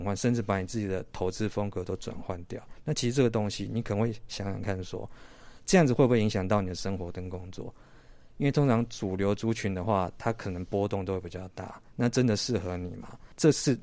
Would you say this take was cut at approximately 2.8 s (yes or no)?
no